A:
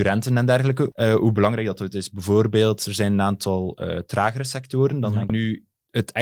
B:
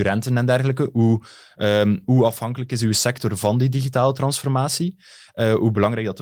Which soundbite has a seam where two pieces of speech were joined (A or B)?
A